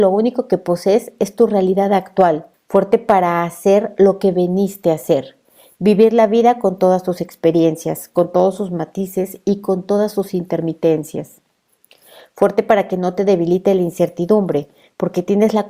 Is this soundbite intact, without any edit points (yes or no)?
no